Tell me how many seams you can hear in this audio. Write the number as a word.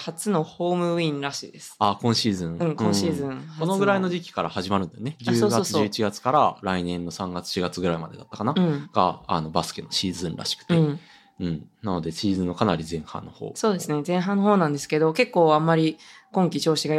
zero